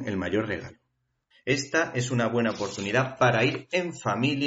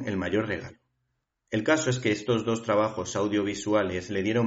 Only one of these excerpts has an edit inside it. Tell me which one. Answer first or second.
first